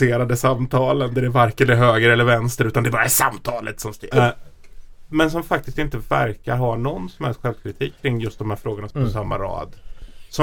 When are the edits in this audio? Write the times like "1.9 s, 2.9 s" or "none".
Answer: 4.1 s, 8.9 s

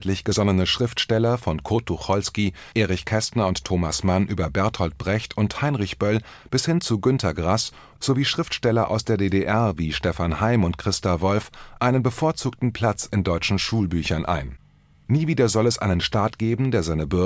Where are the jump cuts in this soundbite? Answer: 2.7 s

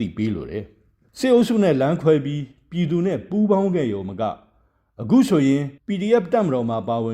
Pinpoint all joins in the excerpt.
5.8 s

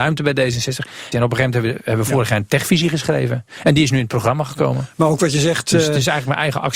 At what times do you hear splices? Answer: 1.1 s

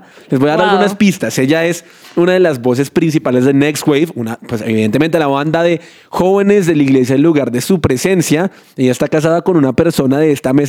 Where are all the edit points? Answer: none

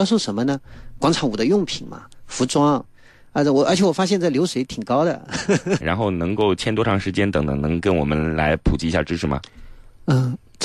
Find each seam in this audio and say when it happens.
5.8 s

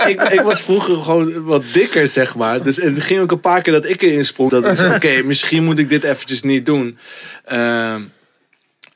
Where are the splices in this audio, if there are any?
4.5 s

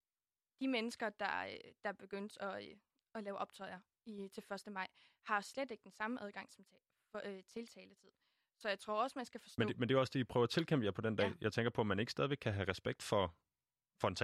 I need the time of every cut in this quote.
none

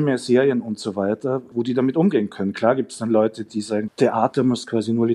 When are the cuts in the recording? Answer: 1.5 s, 3.9 s

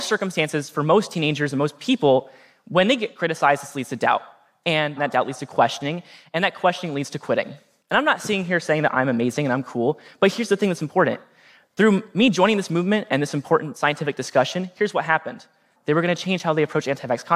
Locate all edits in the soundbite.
7.8 s, 15.8 s

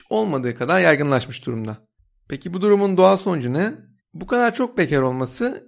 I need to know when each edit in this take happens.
4.0 s

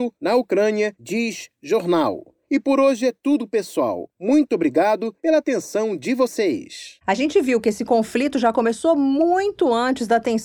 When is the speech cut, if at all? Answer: none

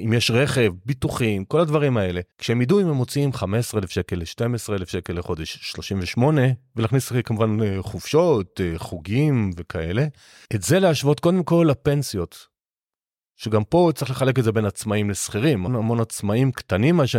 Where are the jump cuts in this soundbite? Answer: 2.3 s, 15.7 s

